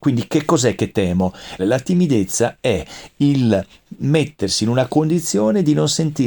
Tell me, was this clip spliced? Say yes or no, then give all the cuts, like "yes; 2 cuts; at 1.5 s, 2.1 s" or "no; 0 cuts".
yes; 1 cut; at 1.6 s